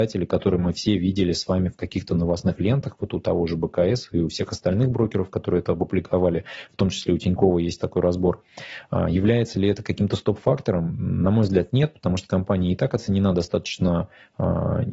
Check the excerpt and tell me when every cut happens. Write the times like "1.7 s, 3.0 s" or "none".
none